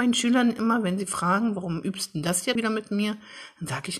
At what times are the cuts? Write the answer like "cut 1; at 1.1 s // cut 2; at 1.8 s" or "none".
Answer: cut 1; at 2.6 s